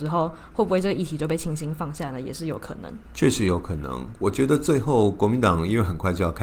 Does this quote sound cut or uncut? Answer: uncut